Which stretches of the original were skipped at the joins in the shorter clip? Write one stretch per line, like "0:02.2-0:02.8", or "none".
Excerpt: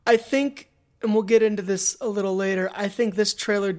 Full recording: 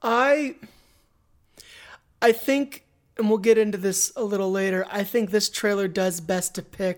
none